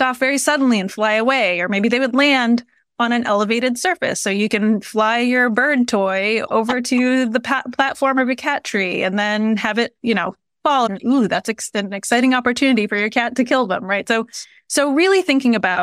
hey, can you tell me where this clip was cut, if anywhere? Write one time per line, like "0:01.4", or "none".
0:10.9